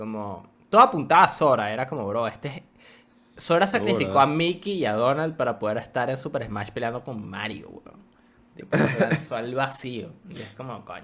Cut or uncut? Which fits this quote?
uncut